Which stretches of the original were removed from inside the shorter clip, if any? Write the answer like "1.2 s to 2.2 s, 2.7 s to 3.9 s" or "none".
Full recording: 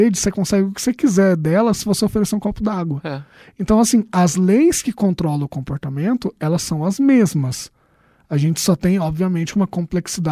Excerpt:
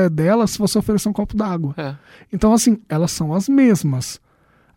4.1 s to 6.3 s